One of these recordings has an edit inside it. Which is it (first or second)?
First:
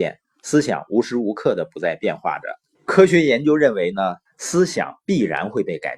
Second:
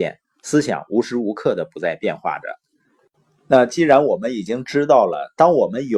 first